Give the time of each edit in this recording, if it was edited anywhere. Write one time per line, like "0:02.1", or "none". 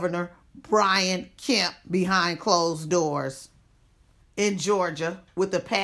0:04.2